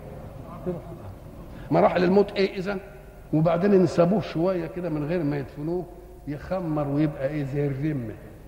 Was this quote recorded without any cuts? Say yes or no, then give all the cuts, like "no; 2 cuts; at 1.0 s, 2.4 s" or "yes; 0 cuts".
no; 2 cuts; at 1.7 s, 3.3 s